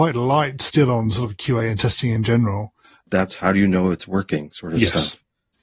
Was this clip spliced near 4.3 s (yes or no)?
no